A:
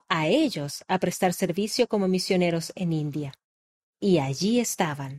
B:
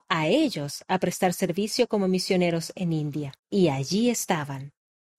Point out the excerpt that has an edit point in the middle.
B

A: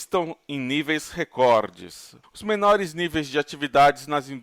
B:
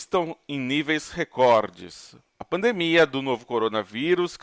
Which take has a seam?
A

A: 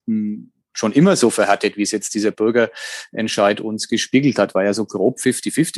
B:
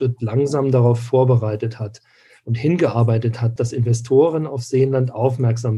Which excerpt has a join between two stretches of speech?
B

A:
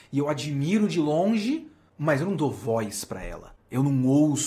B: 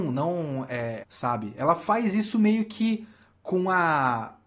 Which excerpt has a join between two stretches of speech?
B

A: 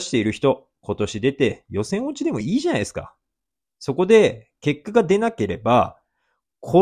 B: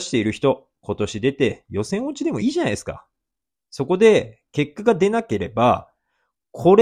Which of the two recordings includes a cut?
B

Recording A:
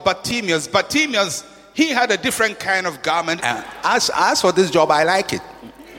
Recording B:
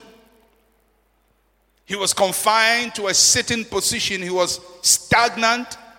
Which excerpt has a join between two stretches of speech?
A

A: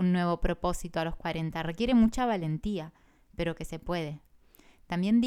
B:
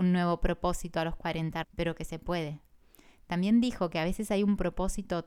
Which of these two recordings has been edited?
B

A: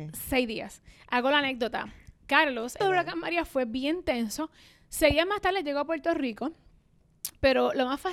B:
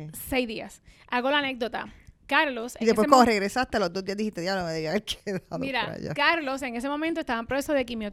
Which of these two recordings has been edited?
A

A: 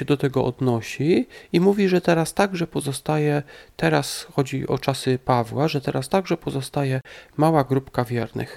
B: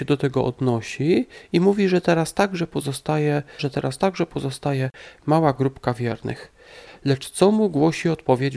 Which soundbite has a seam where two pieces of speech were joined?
B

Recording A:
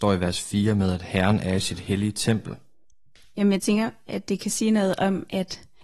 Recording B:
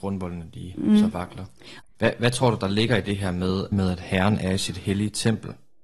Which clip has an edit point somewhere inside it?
B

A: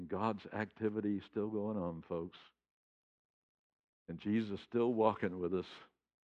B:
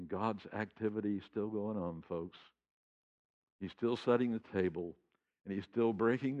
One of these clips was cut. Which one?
B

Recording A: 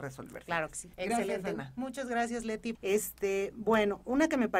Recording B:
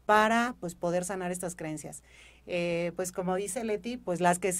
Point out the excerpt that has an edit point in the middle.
A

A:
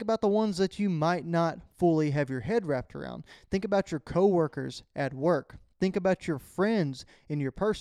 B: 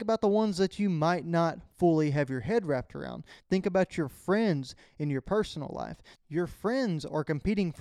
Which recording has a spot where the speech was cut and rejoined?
B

